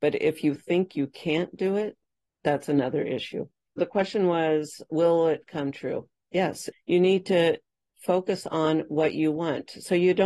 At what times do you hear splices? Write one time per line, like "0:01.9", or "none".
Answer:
0:06.7